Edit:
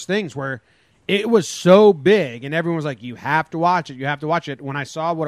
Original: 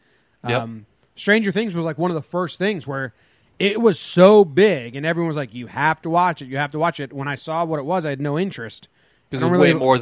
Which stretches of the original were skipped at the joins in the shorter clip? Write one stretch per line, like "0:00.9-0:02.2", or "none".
none

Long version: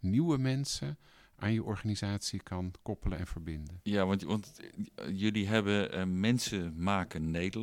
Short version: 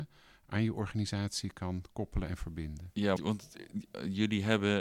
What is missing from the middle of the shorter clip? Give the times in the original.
0:04.1-0:04.2

